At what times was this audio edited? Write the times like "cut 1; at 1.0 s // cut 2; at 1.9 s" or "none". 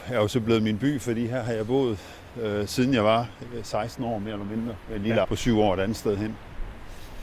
cut 1; at 5.2 s